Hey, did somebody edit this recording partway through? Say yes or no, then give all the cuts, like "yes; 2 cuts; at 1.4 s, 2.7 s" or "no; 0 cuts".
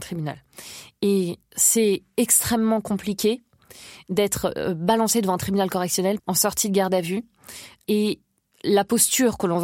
yes; 1 cut; at 6.2 s